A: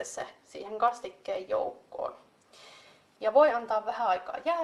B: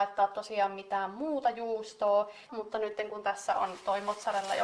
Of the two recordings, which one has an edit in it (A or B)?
B